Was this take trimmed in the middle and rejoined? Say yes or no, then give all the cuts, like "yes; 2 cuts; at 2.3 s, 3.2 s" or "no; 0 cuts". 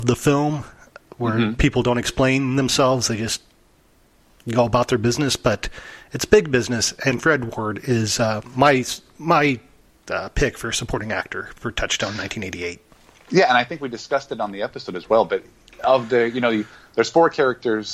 no; 0 cuts